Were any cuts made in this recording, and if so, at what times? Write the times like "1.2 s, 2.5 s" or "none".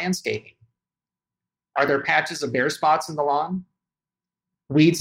none